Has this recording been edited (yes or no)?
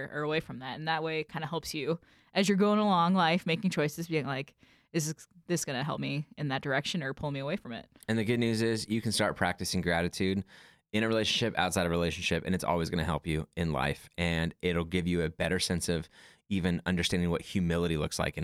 no